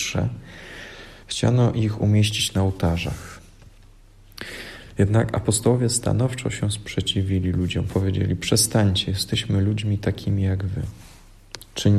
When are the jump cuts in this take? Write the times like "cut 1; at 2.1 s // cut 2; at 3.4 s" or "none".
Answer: none

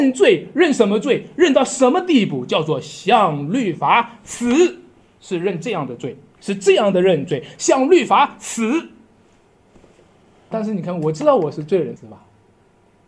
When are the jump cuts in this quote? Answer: cut 1; at 10.5 s // cut 2; at 12.0 s

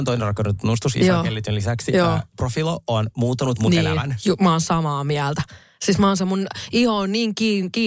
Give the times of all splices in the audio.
none

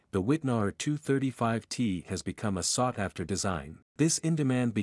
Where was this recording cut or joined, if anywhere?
cut 1; at 3.9 s

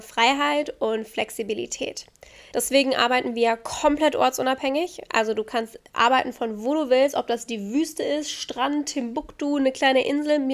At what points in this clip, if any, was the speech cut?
cut 1; at 2.5 s

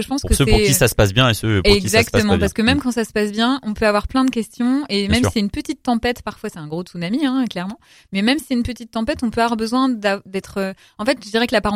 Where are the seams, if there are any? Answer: none

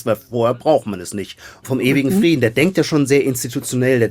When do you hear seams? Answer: cut 1; at 1.6 s

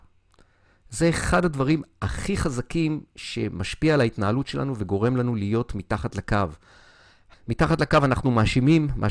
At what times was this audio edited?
cut 1; at 7.3 s

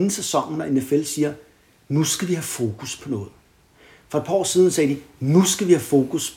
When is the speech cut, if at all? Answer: none

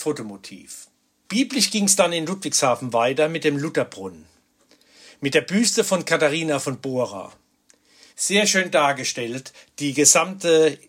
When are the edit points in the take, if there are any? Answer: cut 1; at 1.2 s // cut 2; at 8.1 s

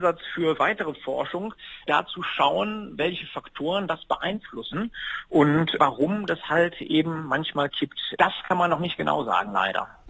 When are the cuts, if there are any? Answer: none

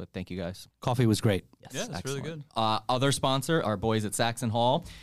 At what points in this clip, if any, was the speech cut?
cut 1; at 2.5 s // cut 2; at 3.6 s

